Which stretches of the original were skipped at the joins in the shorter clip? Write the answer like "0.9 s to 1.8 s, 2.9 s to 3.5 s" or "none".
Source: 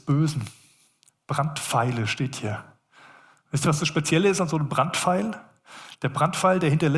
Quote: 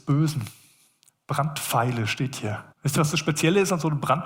2.7 s to 3.4 s